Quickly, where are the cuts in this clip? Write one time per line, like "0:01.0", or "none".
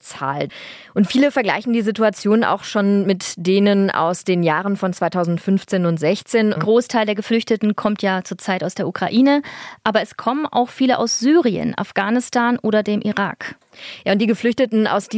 0:06.6